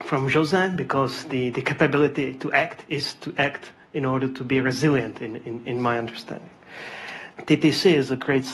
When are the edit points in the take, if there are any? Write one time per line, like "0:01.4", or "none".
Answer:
0:05.6
0:07.3